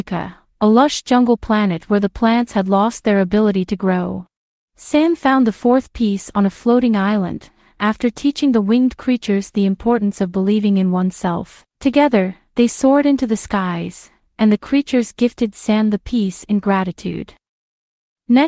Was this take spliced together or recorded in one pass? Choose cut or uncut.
cut